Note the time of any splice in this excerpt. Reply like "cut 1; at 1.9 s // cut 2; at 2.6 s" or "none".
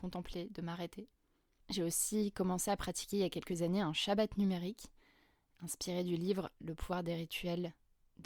cut 1; at 1.6 s